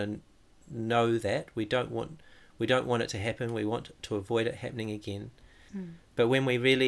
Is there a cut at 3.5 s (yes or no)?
no